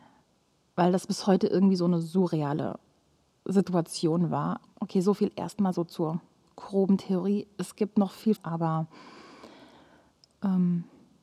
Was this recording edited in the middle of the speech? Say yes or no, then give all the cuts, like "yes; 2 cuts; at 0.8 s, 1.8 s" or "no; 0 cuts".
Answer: yes; 2 cuts; at 4.6 s, 8.4 s